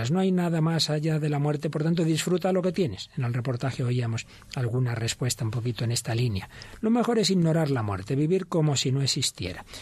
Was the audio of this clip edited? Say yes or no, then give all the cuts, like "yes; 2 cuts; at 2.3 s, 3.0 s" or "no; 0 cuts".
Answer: no; 0 cuts